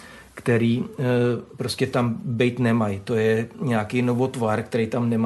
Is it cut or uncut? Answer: uncut